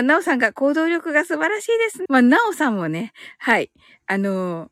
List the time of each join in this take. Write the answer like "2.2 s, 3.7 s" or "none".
2.1 s, 3.3 s